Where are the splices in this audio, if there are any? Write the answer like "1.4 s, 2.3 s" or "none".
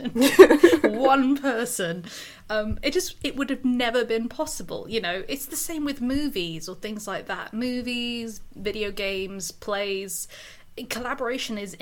none